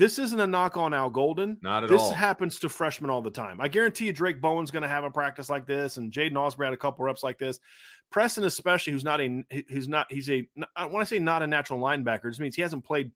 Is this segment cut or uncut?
uncut